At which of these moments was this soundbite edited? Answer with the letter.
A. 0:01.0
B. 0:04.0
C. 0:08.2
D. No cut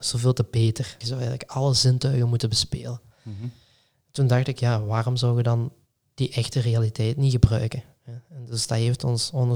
A